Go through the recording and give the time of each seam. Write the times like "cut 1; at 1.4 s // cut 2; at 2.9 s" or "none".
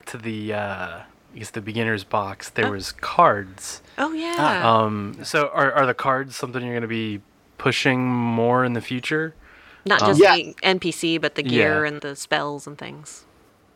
cut 1; at 12.0 s